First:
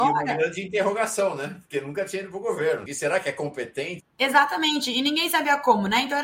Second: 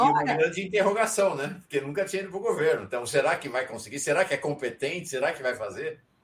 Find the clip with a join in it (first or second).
first